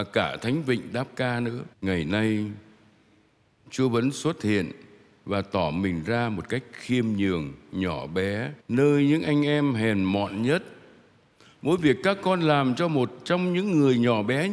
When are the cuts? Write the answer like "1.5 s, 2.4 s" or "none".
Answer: 1.7 s, 8.6 s